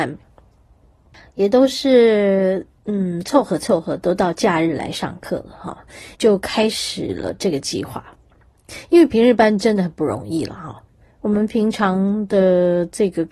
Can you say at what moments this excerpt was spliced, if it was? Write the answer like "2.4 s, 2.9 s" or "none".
6.1 s

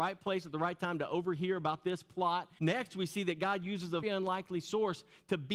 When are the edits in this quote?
2.6 s, 4.0 s

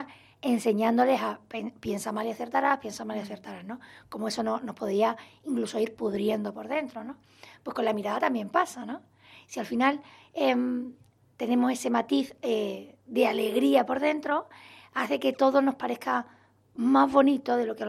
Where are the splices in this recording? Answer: none

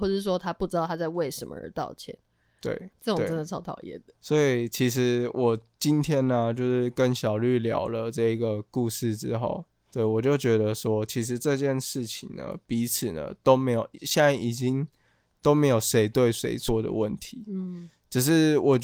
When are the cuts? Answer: 2.9 s

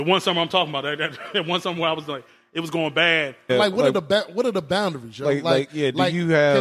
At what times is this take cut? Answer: 3.5 s

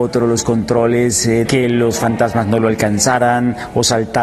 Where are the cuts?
1.4 s

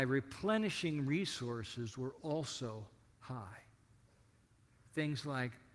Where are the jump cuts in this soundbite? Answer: none

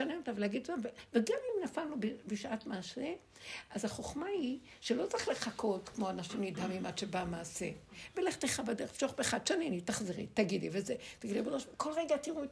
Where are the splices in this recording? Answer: none

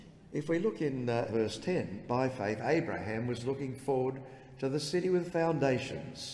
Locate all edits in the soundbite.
1.3 s

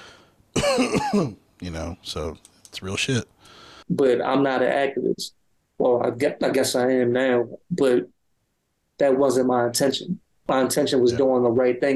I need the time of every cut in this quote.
3.8 s

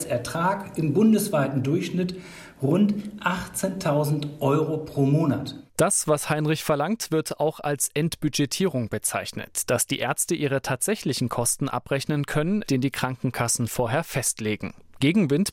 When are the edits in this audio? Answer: 5.7 s, 12.6 s

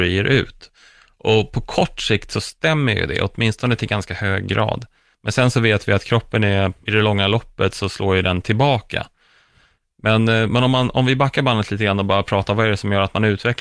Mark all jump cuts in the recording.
none

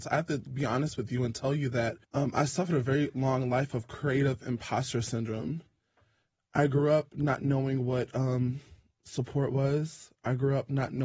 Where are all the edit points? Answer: 2.0 s

